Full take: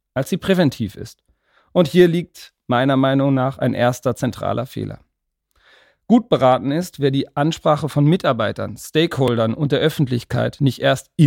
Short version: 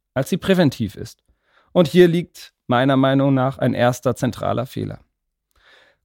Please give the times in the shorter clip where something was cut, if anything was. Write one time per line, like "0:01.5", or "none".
none